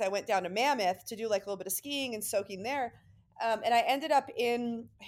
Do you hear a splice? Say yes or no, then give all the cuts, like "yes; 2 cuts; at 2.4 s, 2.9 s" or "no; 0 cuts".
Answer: no; 0 cuts